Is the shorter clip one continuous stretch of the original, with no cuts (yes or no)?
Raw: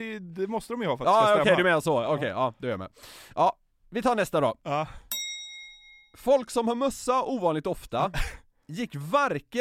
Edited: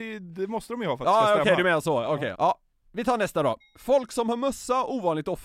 no